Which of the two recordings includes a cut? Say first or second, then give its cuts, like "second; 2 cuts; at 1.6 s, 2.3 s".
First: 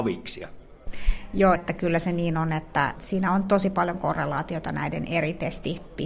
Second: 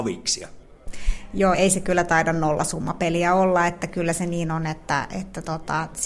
first; 2 cuts; at 1.5 s, 2.9 s